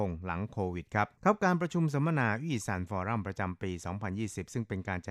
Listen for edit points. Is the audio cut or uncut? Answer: cut